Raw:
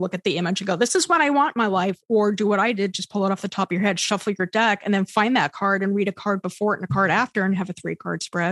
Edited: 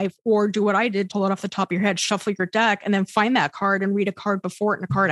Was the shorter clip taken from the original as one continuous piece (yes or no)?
no